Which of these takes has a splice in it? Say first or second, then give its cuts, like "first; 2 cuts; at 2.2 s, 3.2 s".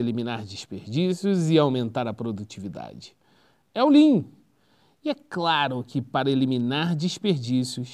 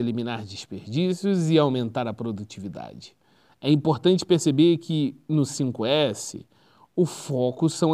second; 1 cut; at 3.5 s